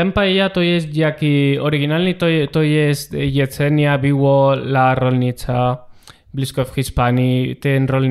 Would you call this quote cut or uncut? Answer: uncut